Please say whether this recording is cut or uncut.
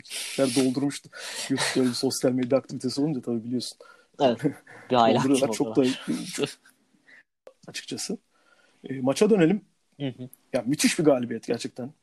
cut